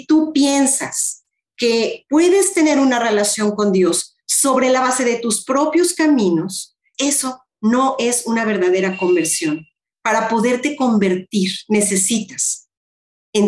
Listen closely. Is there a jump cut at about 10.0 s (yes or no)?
no